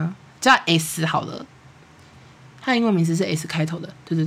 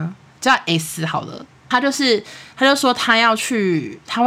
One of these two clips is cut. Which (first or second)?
second